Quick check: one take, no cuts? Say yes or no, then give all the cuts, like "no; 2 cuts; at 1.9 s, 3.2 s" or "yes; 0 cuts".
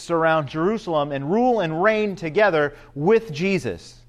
yes; 0 cuts